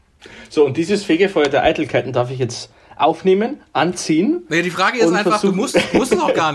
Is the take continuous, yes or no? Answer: yes